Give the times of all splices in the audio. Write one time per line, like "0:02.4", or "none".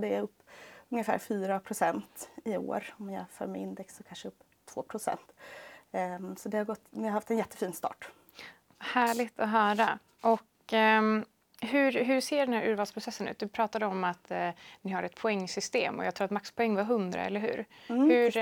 none